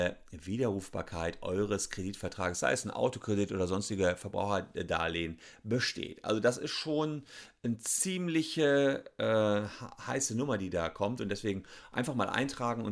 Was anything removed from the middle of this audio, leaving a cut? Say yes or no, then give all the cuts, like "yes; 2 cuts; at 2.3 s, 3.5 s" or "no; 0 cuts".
no; 0 cuts